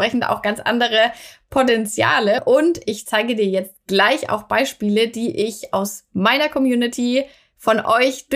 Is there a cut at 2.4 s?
yes; 1 cut; at 2.4 s

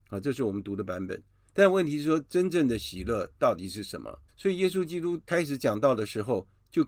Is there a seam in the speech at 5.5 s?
no; 2 cuts; at 1.5 s, 4.3 s

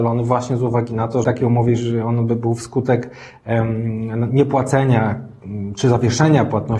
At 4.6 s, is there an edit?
no; 1 cut; at 1.2 s

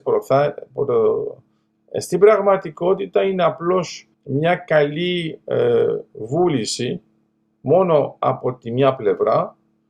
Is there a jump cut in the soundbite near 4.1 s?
yes; 2 cuts; at 1.7 s, 4.1 s

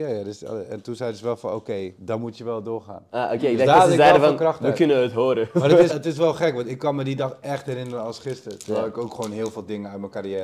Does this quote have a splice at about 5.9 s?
yes; 1 cut; at 5.9 s

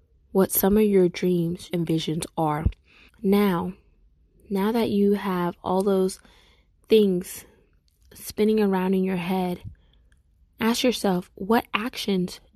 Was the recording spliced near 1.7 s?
yes; 2 cuts; at 1.7 s, 3.1 s

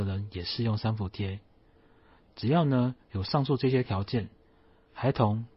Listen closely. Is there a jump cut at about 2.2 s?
no; 0 cuts

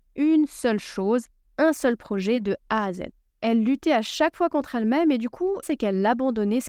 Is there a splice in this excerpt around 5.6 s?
yes; 1 cut; at 5.6 s

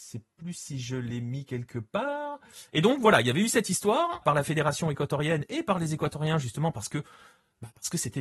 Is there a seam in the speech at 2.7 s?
yes; 2 cuts; at 2.7 s, 4.2 s

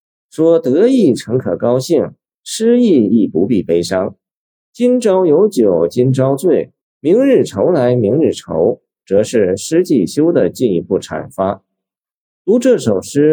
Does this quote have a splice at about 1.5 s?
no; 3 cuts; at 4.6 s, 6.8 s, 12.3 s

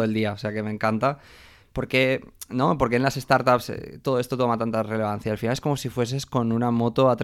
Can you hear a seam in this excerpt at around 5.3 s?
no; 1 cut; at 1.6 s

